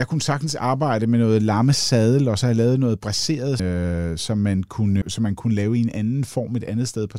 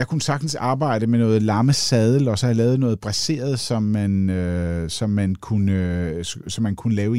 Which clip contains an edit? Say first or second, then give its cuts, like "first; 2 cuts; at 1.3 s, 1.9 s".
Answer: first; 2 cuts; at 3.6 s, 5.0 s